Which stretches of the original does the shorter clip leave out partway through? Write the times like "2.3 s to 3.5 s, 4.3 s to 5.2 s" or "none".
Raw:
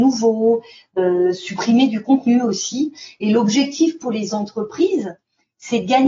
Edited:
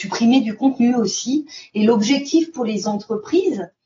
none